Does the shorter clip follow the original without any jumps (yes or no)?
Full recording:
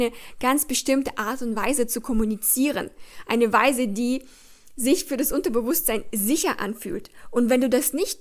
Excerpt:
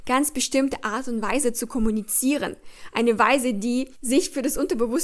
no